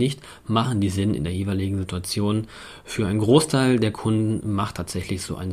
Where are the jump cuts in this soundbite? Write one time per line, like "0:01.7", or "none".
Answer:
none